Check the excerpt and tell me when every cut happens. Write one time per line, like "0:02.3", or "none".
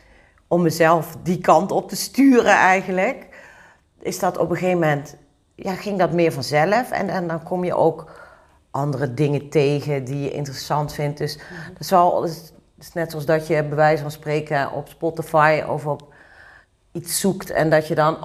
none